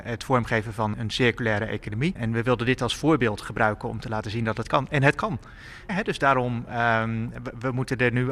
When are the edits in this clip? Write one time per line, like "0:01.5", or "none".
0:00.9
0:05.9